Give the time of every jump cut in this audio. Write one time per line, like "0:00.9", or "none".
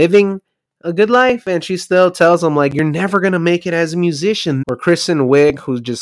0:04.6